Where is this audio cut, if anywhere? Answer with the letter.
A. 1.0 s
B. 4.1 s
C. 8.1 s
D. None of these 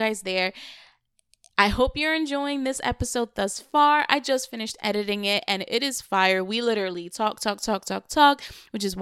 D